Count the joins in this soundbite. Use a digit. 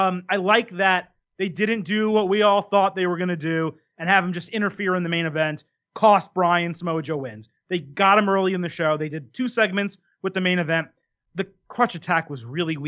0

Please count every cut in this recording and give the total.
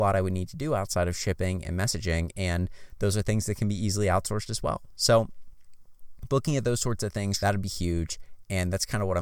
1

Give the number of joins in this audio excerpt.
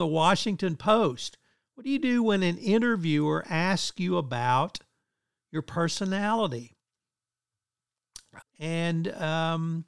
1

